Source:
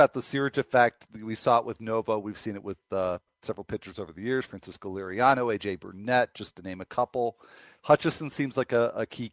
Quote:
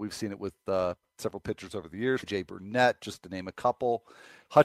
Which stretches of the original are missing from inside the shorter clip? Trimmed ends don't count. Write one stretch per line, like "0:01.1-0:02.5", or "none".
0:04.5-0:05.6